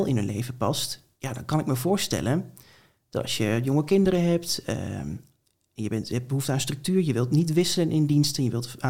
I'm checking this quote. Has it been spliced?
no; 0 cuts

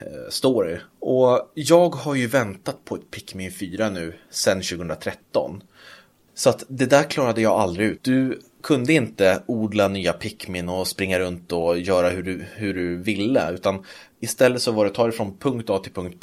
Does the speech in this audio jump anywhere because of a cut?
yes; 3 cuts; at 0.9 s, 6.3 s, 8.0 s

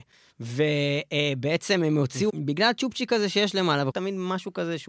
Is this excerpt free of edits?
no; 2 cuts; at 2.3 s, 3.9 s

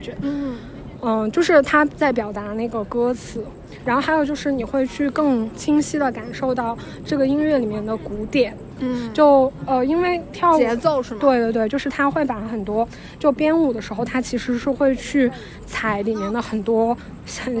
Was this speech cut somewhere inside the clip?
no; 0 cuts

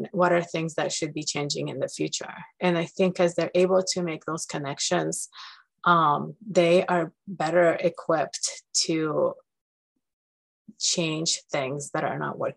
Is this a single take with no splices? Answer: yes; 0 cuts

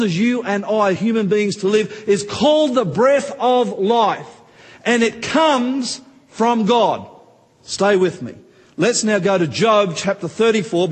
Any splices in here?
no; 0 cuts

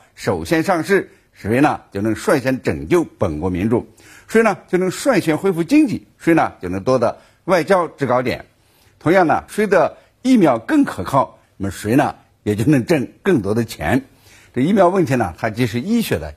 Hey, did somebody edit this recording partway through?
yes; 2 cuts; at 9.5 s, 11.4 s

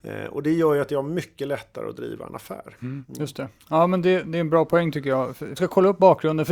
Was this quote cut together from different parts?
yes; 1 cut; at 5.6 s

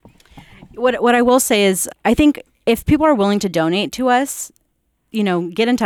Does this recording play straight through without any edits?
no; 1 cut; at 1.9 s

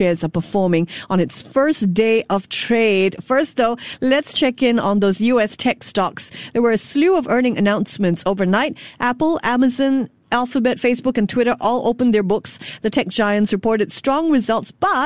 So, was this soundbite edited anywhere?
no; 0 cuts

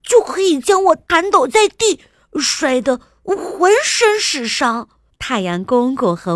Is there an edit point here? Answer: yes; 1 cut; at 5.1 s

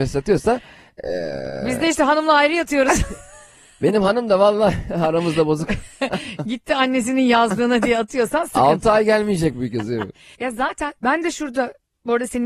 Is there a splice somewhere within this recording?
yes; 2 cuts; at 9.5 s, 11.0 s

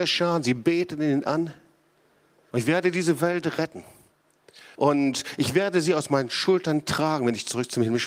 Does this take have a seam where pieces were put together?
yes; 2 cuts; at 2.5 s, 4.7 s

